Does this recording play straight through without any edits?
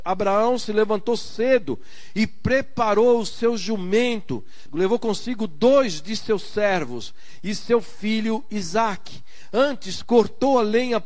no; 1 cut; at 4.7 s

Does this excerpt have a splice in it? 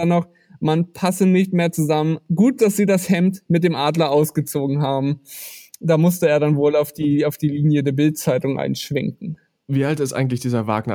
no; 0 cuts

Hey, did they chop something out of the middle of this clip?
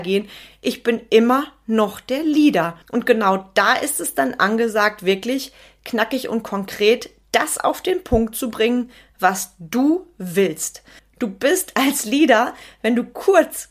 yes; 2 cuts; at 2.8 s, 11.0 s

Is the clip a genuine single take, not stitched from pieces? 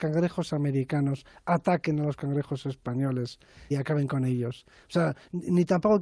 no; 1 cut; at 3.7 s

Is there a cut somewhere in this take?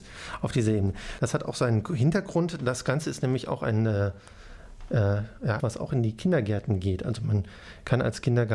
yes; 2 cuts; at 1.2 s, 5.6 s

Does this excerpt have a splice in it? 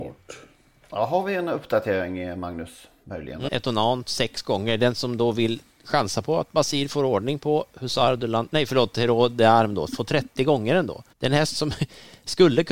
yes; 2 cuts; at 3.5 s, 11.1 s

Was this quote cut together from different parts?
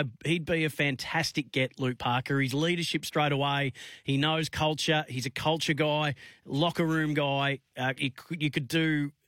no; 0 cuts

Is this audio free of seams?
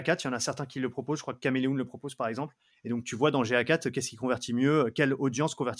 no; 1 cut; at 2.7 s

